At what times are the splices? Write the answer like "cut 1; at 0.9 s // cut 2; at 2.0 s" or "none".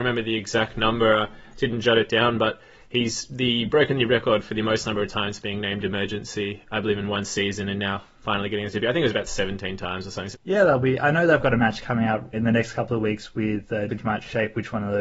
cut 1; at 10.3 s // cut 2; at 12.3 s // cut 3; at 13.9 s